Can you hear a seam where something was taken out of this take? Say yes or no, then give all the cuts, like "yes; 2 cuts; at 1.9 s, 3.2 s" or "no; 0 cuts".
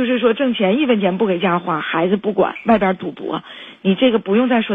no; 0 cuts